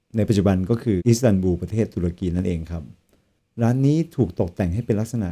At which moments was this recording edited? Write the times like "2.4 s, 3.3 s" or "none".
1.0 s